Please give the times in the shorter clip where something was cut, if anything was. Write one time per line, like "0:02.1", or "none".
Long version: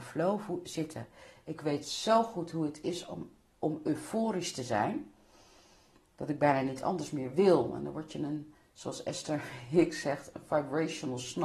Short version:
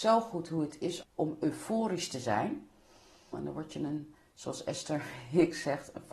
0:01.0
0:03.3